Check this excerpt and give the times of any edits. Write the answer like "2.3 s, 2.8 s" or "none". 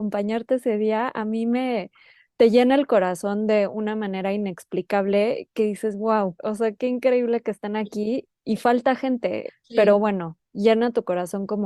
6.4 s, 9.5 s